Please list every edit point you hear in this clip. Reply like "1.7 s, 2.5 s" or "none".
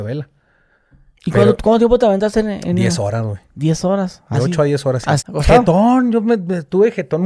5.2 s